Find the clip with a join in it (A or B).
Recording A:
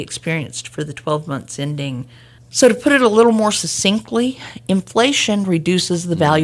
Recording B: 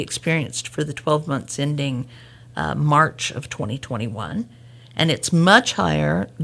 A